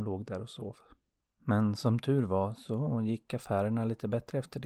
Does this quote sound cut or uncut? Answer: cut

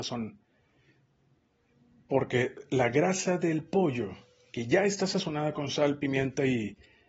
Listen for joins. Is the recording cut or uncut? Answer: uncut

